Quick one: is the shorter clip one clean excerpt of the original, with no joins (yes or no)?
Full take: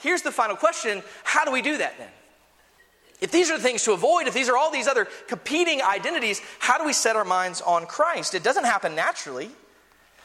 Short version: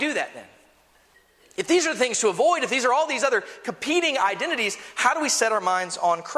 yes